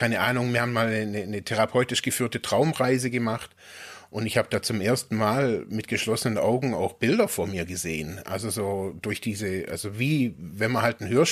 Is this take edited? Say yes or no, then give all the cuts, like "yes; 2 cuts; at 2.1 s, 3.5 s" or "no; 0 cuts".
no; 0 cuts